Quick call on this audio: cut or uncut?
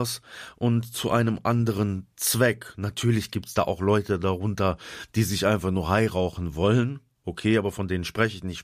uncut